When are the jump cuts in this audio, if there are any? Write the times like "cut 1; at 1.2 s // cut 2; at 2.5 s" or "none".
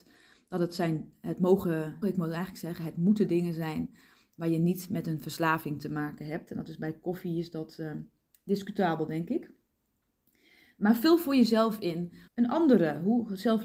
cut 1; at 2.0 s // cut 2; at 12.3 s